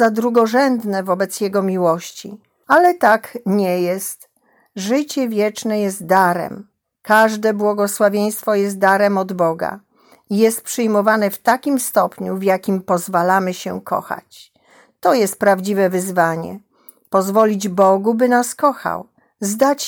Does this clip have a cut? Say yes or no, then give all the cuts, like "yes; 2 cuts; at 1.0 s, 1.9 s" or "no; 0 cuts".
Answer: yes; 1 cut; at 2.6 s